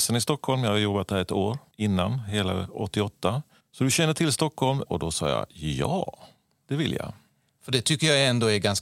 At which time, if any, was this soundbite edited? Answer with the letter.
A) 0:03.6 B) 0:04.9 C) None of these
B